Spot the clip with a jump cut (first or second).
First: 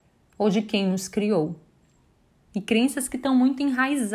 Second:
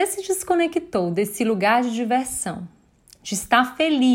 first